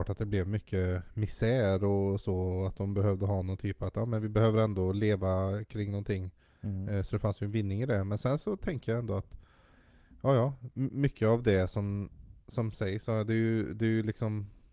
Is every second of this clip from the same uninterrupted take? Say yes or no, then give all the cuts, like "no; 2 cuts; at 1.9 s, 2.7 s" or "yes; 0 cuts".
yes; 0 cuts